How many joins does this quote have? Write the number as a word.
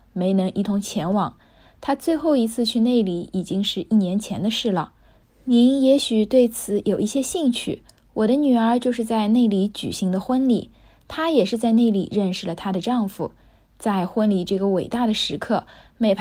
one